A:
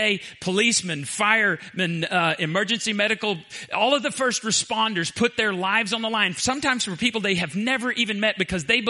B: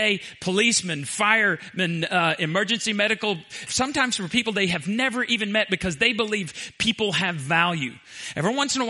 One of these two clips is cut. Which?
B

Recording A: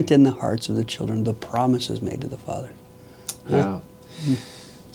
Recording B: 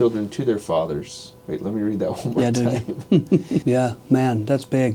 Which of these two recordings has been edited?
B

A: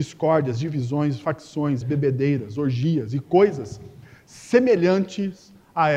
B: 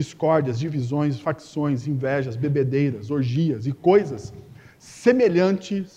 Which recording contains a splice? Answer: A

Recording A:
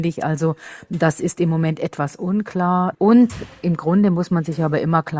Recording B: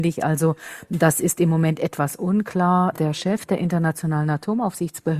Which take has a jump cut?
A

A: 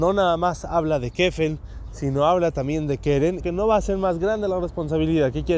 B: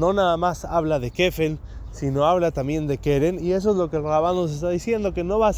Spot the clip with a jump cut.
A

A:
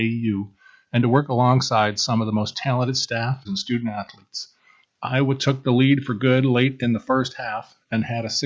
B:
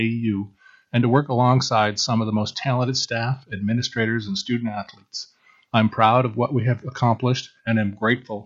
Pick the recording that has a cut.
A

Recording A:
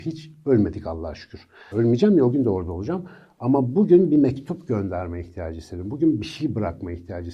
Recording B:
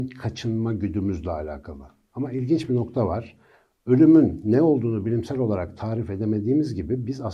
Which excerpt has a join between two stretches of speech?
A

